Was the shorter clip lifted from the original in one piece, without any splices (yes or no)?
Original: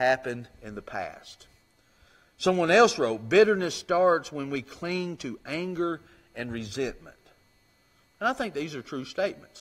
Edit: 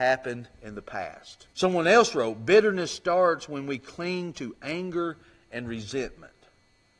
no